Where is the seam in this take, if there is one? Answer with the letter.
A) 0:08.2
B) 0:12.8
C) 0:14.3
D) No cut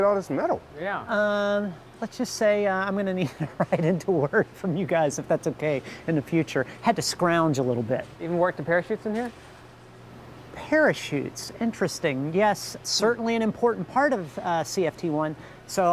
B